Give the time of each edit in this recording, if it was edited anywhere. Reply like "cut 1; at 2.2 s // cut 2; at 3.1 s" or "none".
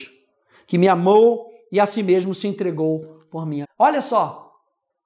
cut 1; at 3.6 s